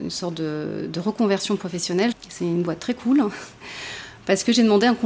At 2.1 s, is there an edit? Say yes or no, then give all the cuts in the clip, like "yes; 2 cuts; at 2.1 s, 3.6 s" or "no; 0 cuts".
yes; 1 cut; at 2.1 s